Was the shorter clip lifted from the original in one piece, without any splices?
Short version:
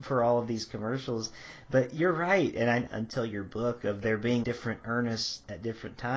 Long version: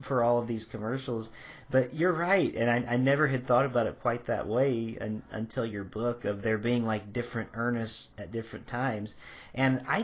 no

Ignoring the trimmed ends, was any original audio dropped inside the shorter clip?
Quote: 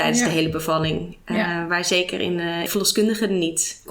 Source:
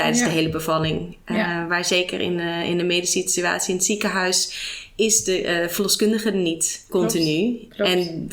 yes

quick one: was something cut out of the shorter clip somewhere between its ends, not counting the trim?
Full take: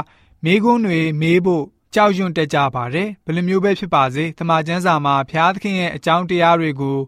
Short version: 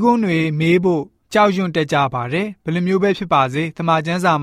no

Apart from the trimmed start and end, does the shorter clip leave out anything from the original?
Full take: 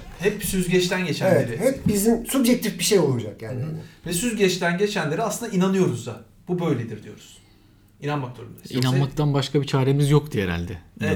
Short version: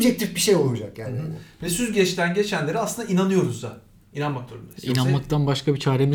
yes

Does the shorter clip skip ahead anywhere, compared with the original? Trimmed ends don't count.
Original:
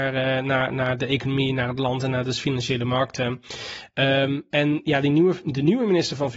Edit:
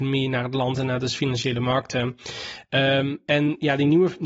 no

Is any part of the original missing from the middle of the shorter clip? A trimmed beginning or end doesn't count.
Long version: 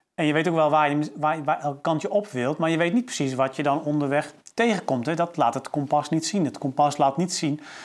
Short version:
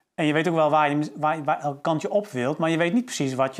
no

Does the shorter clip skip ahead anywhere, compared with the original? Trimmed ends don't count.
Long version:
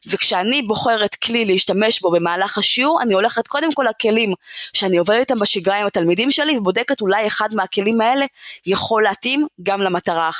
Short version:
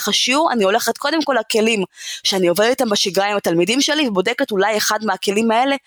no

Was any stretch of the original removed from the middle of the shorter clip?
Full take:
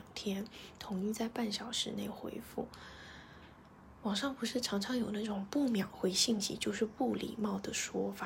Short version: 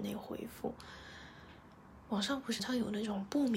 yes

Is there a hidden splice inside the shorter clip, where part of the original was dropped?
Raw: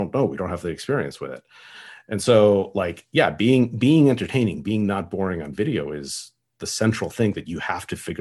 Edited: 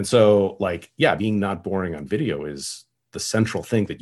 yes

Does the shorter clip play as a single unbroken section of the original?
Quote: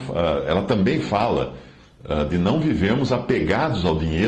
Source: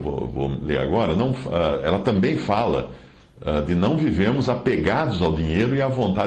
yes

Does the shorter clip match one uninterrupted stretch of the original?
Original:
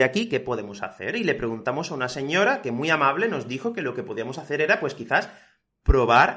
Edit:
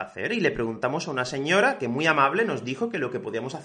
yes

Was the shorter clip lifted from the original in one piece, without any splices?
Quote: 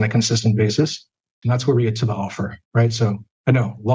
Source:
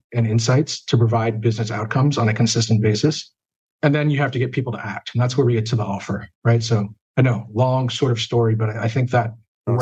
no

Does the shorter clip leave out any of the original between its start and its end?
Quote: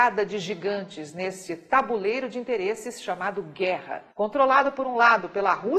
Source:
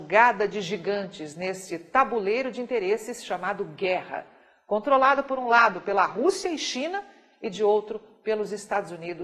yes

